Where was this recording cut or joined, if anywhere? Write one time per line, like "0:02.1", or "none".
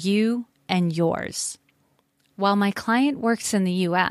0:02.3